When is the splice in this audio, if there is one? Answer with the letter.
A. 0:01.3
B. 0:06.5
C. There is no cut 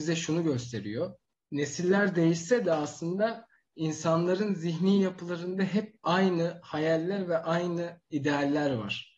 C